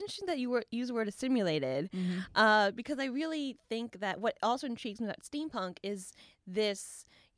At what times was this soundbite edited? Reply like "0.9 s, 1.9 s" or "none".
none